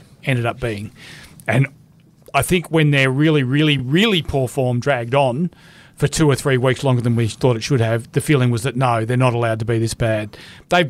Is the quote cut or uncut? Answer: uncut